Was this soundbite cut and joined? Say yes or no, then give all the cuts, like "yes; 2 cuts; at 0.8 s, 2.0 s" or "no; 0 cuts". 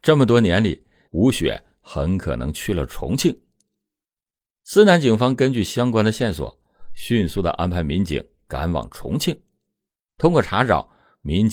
yes; 1 cut; at 1.1 s